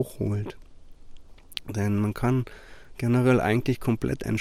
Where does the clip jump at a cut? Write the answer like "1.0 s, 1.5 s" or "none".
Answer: none